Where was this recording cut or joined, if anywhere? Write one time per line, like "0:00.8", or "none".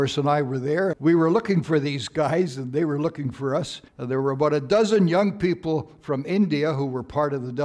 0:00.9
0:03.9